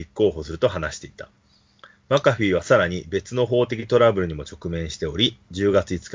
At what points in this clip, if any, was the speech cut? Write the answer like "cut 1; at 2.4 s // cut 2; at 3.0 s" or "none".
none